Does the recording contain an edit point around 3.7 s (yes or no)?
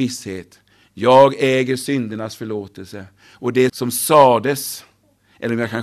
yes